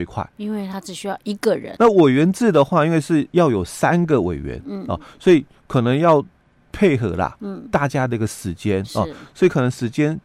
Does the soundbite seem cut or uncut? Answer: cut